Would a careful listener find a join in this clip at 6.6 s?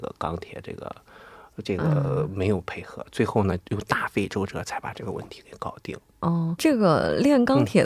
yes; 1 cut; at 6.6 s

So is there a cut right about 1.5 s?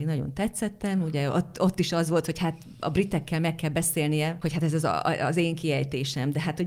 no; 0 cuts

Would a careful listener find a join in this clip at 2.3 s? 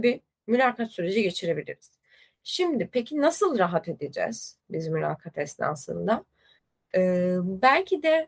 no; 1 cut; at 6.9 s

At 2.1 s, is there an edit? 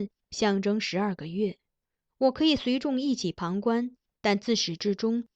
yes; 1 cut; at 2.1 s

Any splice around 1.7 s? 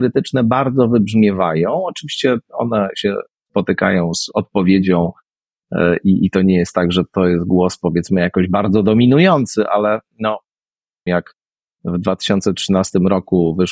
no; 1 cut; at 11.1 s

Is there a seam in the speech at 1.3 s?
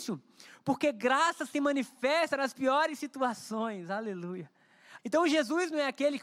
no; 1 cut; at 5.0 s

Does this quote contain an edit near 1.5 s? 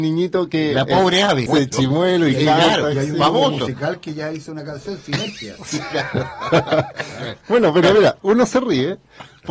yes; 1 cut; at 1.5 s

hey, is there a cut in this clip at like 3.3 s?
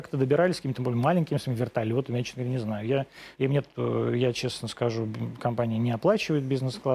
yes; 1 cut; at 3.3 s

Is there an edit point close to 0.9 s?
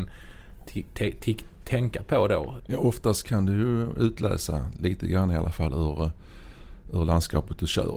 no; 1 cut; at 2.6 s

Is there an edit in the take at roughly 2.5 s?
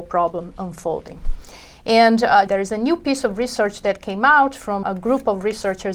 yes; 2 cuts; at 2.5 s, 4.8 s

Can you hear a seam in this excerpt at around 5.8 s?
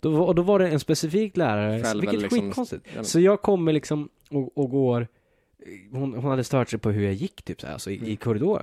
no; 1 cut; at 1.8 s

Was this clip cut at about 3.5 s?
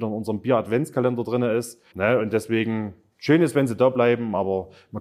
no; 1 cut; at 1.9 s

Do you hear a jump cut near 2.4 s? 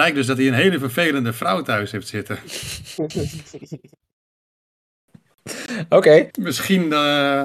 no; 1 cut; at 6.3 s

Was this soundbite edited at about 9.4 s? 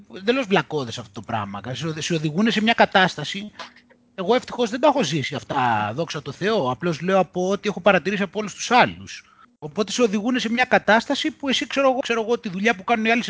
yes; 2 cuts; at 9.4 s, 12.0 s

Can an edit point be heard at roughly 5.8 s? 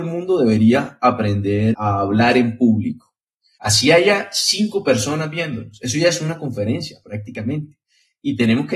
no; 2 cuts; at 1.7 s, 3.6 s

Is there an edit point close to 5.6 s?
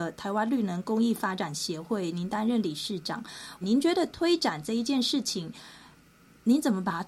no; 1 cut; at 3.6 s

